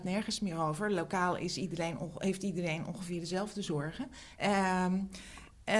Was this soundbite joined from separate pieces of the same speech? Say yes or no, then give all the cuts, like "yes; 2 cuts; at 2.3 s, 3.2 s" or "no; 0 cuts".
yes; 1 cut; at 4.4 s